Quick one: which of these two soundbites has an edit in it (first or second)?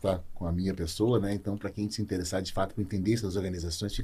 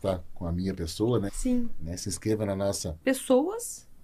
second